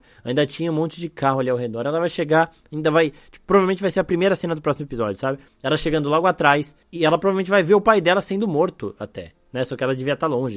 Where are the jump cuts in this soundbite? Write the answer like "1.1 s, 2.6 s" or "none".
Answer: none